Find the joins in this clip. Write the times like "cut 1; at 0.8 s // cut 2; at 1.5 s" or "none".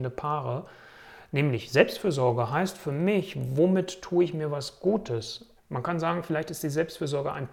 cut 1; at 5.6 s